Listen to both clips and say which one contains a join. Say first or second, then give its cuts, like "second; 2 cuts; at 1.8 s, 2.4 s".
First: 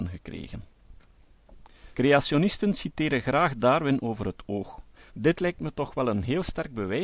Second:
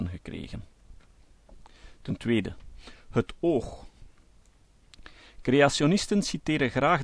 first; 2 cuts; at 1.9 s, 5.1 s